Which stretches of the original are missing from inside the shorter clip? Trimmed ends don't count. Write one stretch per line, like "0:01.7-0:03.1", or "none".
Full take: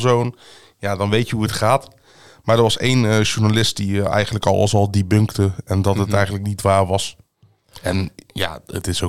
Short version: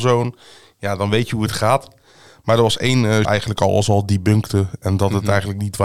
0:03.2-0:04.1